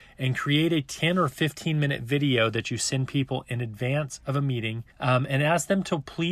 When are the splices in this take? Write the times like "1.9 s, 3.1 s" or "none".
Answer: 4.9 s

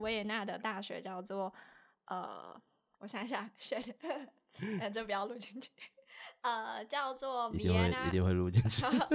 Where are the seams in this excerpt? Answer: none

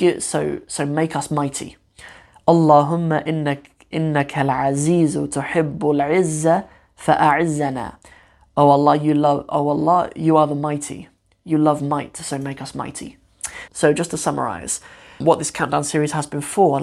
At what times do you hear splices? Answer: 13.7 s, 15.2 s

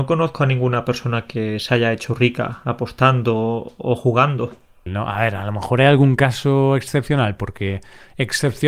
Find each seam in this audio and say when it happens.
4.9 s, 7.4 s

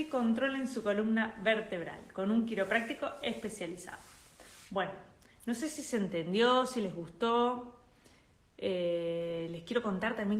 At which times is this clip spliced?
none

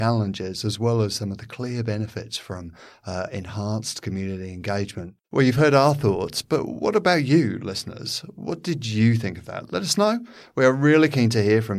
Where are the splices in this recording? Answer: 5.2 s

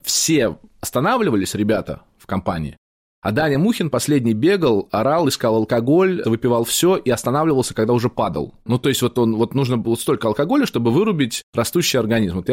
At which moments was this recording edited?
6.2 s, 8.6 s

